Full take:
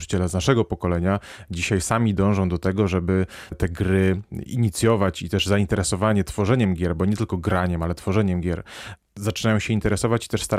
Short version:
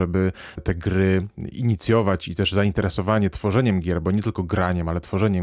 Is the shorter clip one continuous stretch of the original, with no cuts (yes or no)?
yes